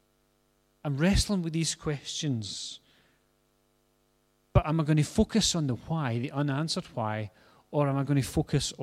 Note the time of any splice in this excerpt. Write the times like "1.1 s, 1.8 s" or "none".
none